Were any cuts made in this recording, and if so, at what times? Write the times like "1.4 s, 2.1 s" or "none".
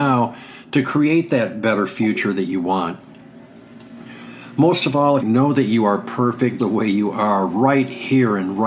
5.2 s, 6.6 s